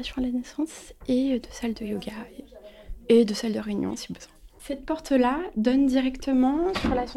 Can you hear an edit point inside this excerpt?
no; 0 cuts

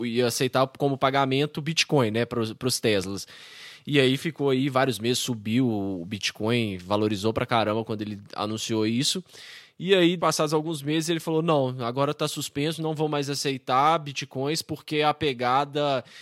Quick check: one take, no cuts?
no; 1 cut; at 10.2 s

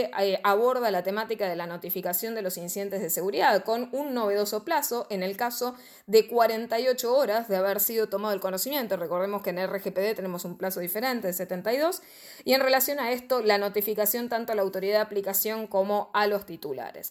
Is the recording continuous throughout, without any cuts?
yes; 0 cuts

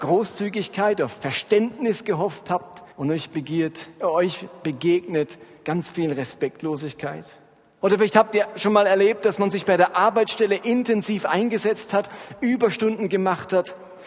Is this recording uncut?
no; 2 cuts; at 2.9 s, 7.8 s

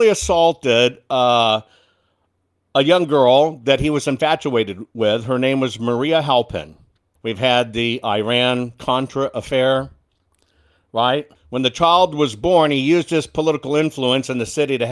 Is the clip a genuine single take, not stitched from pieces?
no; 2 cuts; at 7.2 s, 11.4 s

